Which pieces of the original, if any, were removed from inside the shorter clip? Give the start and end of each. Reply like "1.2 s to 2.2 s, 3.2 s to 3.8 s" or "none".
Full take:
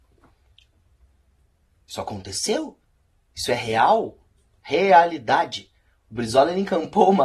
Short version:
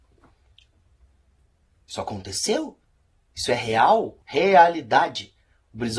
4.2 s to 4.6 s